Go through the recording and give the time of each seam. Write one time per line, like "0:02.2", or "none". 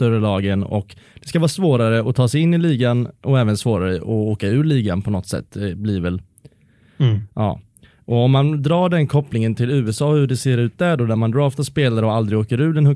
none